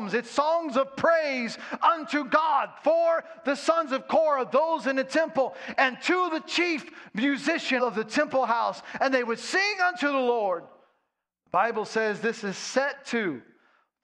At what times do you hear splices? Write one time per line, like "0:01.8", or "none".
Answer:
0:07.8